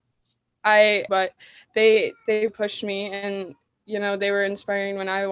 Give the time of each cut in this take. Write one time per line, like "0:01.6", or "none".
0:01.1
0:02.5